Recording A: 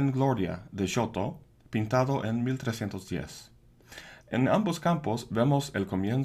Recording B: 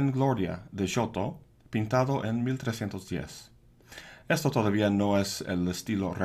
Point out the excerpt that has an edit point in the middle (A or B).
A